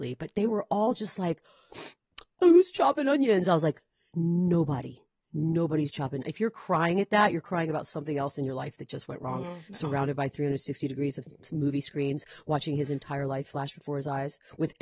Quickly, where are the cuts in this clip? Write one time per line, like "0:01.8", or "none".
0:09.7